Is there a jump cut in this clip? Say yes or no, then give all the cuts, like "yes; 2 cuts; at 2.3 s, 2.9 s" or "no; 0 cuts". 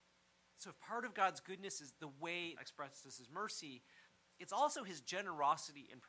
yes; 1 cut; at 2.6 s